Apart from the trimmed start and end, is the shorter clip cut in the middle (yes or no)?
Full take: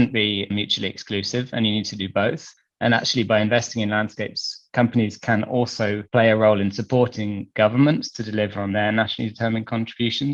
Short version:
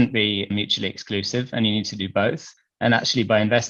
no